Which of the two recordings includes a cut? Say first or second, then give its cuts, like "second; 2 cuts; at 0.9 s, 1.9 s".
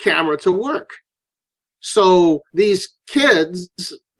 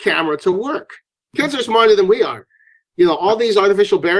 second; 1 cut; at 1.2 s